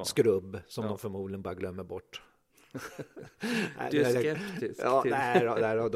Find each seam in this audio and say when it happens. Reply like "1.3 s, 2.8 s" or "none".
none